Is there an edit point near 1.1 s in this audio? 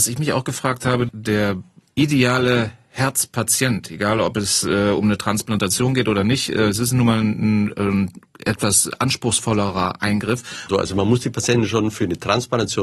yes; 2 cuts; at 1.1 s, 10.7 s

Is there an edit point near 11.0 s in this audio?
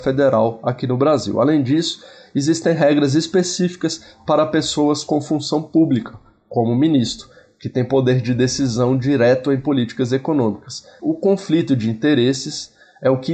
yes; 1 cut; at 11.0 s

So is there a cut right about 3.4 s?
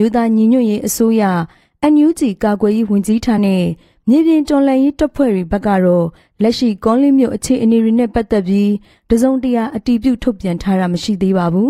yes; 1 cut; at 3.4 s

